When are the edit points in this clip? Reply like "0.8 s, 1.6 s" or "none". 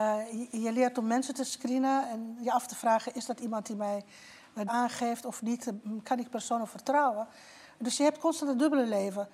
4.7 s